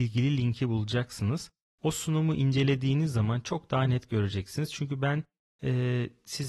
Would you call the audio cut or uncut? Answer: uncut